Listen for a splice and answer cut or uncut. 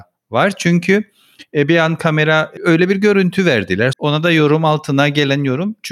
cut